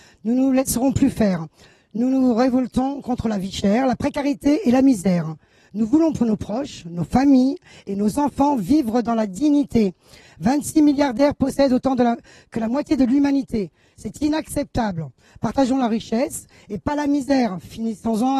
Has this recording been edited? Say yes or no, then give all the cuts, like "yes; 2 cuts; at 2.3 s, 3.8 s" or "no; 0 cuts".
no; 0 cuts